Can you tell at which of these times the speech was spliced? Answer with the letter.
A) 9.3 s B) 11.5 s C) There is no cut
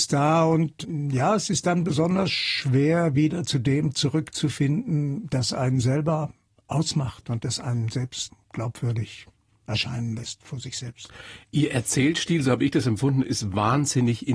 C